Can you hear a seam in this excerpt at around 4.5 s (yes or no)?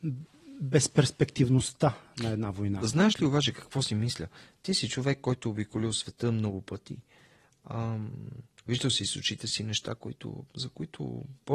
no